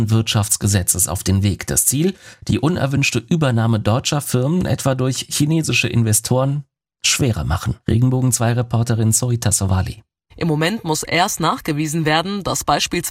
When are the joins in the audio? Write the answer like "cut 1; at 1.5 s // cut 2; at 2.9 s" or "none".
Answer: cut 1; at 7.8 s // cut 2; at 10.3 s